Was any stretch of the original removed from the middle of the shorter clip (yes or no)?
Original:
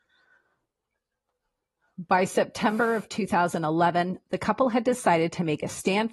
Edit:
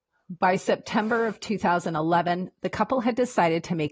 no